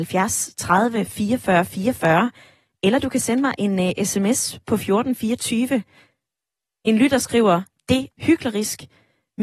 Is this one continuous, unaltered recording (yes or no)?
no